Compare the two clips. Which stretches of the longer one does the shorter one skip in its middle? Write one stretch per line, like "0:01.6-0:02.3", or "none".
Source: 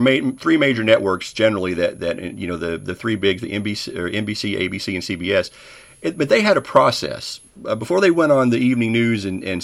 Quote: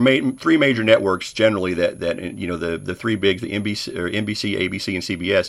none